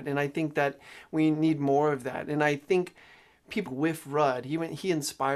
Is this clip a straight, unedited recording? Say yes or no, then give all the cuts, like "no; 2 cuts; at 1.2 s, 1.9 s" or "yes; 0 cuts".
no; 1 cut; at 3.7 s